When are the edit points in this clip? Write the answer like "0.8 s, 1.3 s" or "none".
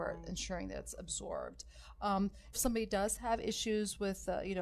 2.5 s